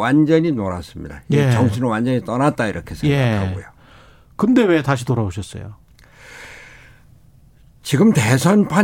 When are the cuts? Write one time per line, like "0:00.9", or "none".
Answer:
none